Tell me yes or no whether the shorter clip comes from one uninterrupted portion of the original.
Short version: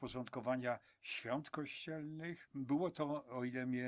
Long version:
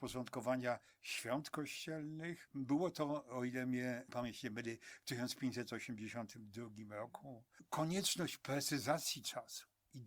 yes